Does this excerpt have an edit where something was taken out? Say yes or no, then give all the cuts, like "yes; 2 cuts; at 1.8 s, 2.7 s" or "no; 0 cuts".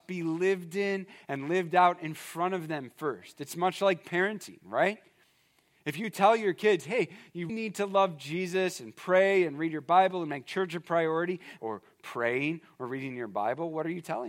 yes; 2 cuts; at 7.5 s, 11.6 s